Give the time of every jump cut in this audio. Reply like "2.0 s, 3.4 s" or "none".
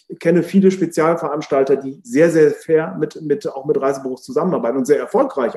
none